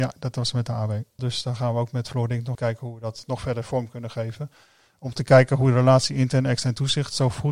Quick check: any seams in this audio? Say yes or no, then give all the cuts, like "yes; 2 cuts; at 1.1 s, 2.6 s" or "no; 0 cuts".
yes; 2 cuts; at 1.2 s, 2.5 s